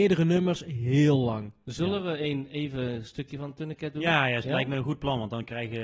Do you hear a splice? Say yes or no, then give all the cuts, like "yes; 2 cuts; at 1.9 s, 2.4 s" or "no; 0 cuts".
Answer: no; 0 cuts